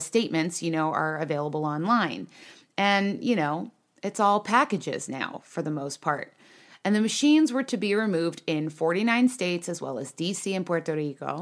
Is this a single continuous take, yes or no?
yes